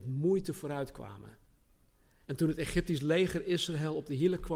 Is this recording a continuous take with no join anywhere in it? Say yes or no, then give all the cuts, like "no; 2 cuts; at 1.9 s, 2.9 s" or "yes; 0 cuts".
no; 1 cut; at 2.2 s